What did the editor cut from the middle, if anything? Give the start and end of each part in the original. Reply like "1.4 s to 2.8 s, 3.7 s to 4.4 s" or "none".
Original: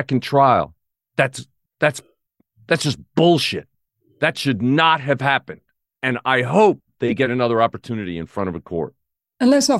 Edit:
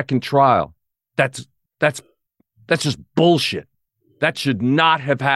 none